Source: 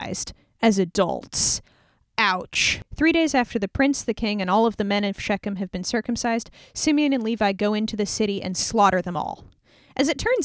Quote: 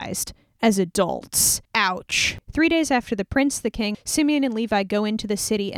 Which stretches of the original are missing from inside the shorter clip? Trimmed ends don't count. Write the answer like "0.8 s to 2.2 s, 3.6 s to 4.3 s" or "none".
1.6 s to 2.1 s, 4.4 s to 6.6 s